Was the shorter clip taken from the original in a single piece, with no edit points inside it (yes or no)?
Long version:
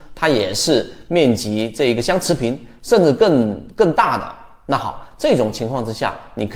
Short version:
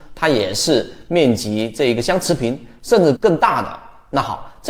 no